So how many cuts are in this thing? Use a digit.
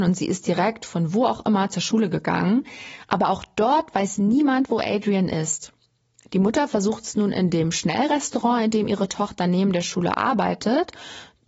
0